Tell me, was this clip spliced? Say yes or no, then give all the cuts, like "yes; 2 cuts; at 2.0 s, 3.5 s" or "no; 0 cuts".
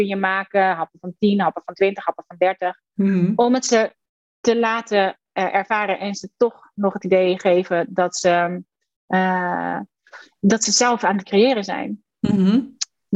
no; 0 cuts